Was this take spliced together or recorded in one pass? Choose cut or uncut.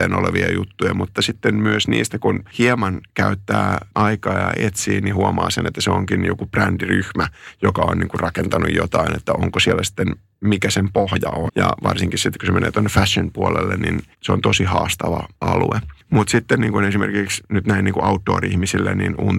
cut